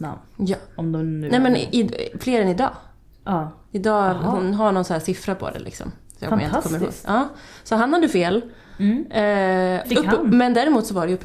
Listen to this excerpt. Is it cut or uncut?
cut